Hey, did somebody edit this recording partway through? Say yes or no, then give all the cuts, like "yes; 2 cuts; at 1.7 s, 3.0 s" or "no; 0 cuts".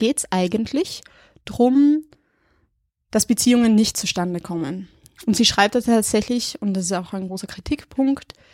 no; 0 cuts